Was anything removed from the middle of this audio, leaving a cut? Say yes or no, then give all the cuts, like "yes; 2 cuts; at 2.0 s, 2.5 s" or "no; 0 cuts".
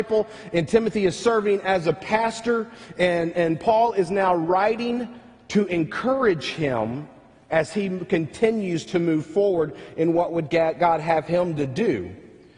no; 0 cuts